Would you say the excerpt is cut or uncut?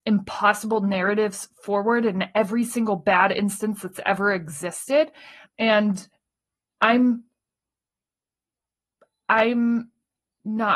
cut